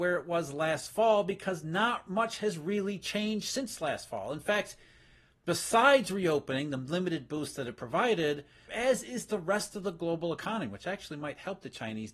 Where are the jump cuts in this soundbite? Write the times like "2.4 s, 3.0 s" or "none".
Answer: 8.7 s